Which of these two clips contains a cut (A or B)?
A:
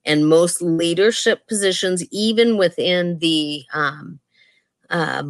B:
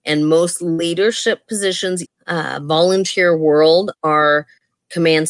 B